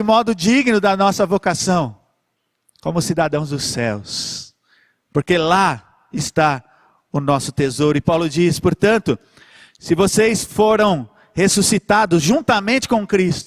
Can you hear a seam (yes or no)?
no